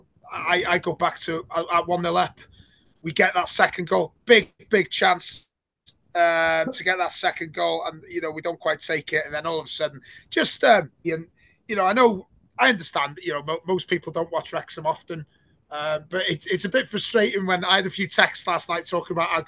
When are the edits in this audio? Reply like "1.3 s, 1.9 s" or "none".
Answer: 11.0 s